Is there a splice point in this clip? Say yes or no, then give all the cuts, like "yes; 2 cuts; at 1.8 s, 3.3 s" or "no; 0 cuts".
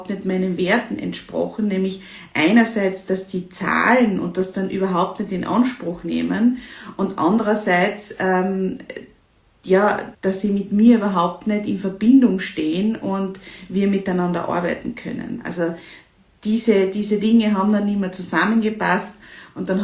yes; 1 cut; at 10.1 s